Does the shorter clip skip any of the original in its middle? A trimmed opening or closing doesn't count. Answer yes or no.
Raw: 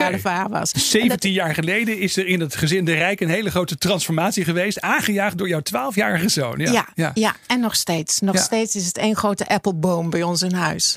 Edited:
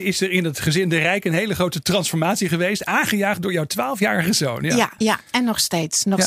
yes